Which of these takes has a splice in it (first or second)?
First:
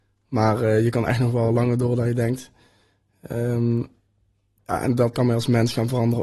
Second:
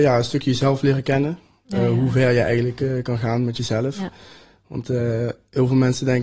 first